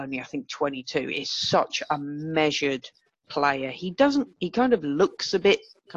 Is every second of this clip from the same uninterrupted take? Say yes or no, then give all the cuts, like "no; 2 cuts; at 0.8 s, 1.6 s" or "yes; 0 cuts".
no; 1 cut; at 4.3 s